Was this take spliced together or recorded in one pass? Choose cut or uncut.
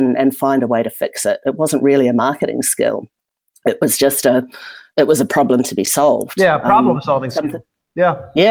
uncut